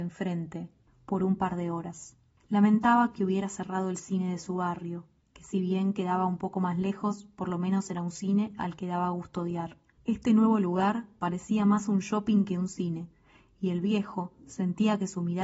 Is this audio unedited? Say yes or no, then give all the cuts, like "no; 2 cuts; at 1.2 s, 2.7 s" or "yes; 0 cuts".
no; 1 cut; at 11.2 s